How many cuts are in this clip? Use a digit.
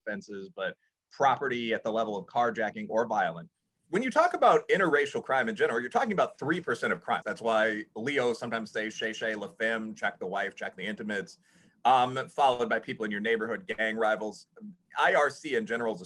1